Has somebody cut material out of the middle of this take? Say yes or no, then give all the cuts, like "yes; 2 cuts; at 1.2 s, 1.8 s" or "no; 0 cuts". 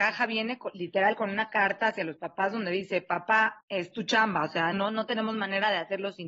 yes; 2 cuts; at 3.6 s, 4.7 s